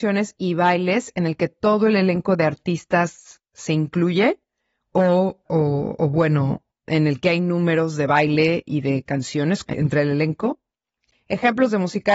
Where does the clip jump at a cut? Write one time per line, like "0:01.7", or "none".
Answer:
0:05.5